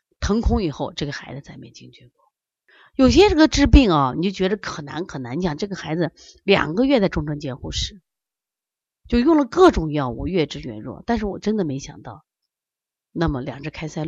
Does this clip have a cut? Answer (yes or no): no